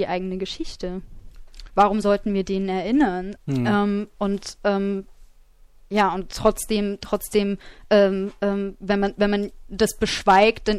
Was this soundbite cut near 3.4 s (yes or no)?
yes